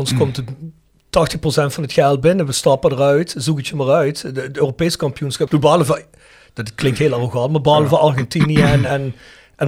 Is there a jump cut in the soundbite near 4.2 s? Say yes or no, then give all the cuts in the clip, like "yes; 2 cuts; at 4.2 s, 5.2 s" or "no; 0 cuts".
no; 1 cut; at 5.5 s